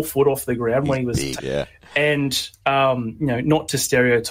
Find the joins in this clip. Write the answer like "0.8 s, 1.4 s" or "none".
1.4 s